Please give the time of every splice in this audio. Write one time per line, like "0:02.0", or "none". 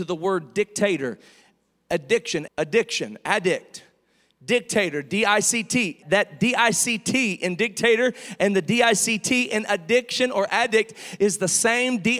0:02.5
0:06.0